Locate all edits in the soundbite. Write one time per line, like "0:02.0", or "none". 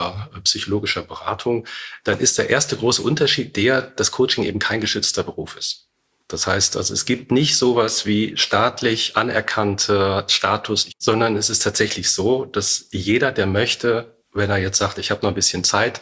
0:10.9
0:14.2